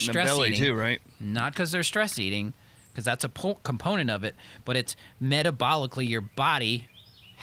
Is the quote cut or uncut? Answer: cut